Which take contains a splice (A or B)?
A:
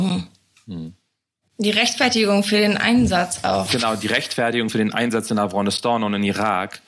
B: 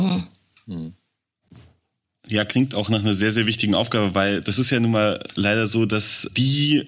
A